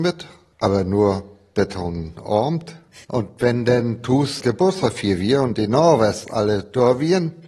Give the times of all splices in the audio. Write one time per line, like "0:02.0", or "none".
0:03.0